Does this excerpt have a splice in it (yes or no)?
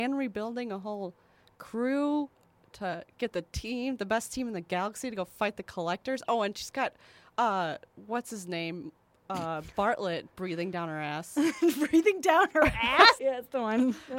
yes